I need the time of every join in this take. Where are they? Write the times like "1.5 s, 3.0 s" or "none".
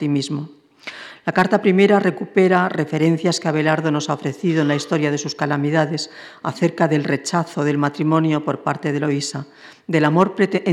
none